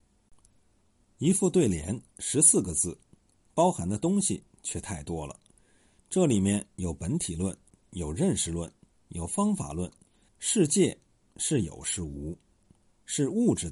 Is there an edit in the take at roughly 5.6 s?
no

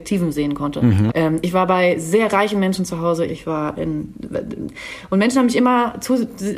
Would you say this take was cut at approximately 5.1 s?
no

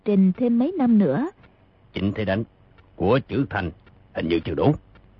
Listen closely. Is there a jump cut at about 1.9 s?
yes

